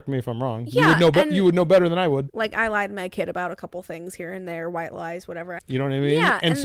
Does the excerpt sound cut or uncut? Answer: cut